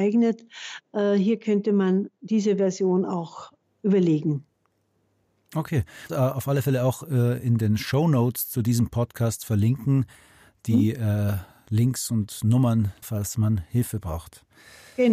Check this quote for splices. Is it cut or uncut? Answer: cut